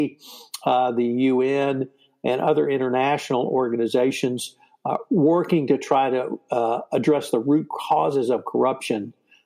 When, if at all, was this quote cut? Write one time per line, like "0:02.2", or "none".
none